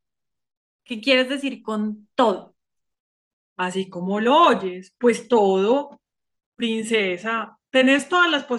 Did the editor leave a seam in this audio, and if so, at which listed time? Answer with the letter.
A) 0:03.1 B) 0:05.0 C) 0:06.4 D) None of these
C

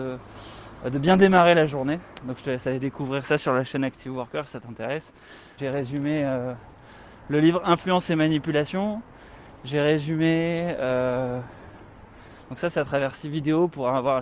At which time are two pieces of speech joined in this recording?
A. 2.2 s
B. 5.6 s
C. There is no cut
B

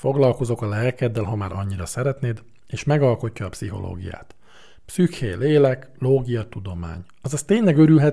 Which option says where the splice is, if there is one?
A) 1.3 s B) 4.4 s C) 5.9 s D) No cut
D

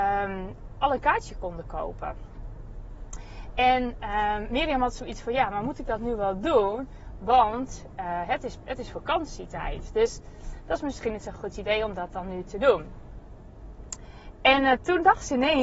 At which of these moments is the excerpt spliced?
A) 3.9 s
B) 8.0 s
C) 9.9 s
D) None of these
D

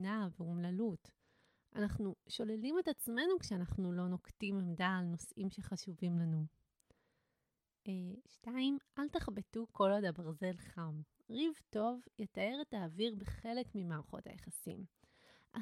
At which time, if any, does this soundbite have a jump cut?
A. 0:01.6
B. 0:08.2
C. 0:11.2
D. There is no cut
D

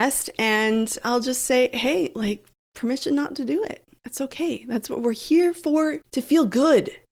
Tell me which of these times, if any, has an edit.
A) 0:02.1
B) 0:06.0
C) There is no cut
B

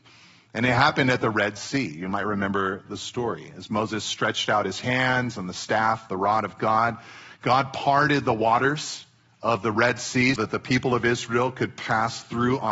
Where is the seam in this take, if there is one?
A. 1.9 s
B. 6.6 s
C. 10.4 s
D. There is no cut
C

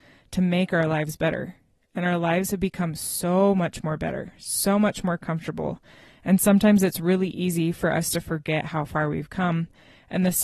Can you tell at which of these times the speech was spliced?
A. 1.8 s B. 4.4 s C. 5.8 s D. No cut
D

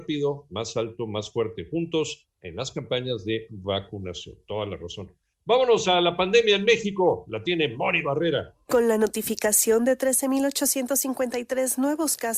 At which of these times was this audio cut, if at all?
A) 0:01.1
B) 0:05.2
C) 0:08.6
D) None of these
D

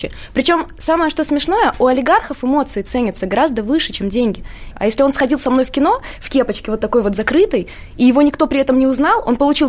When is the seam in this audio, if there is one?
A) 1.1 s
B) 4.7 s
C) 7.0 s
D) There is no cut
B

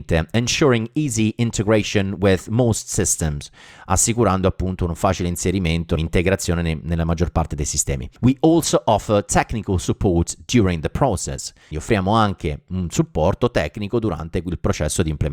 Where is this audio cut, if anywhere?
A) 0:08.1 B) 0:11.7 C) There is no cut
B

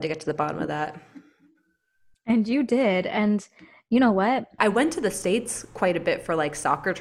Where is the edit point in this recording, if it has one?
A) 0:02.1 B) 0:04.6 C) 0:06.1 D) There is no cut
B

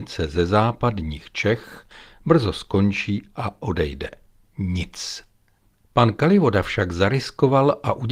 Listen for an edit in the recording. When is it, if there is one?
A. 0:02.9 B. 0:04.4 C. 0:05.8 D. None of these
B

